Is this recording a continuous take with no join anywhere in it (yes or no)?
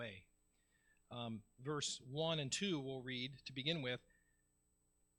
no